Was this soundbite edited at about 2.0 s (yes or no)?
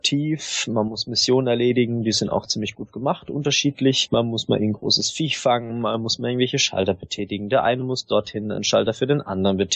no